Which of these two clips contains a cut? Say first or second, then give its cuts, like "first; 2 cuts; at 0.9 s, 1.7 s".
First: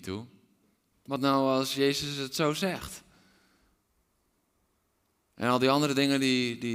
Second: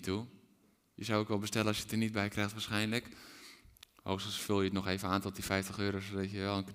first; 1 cut; at 0.9 s